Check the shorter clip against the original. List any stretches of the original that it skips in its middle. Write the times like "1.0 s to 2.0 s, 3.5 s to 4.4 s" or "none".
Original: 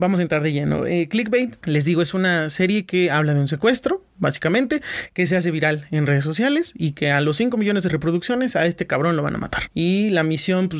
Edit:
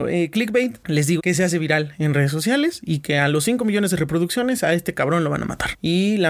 2.0 s to 5.1 s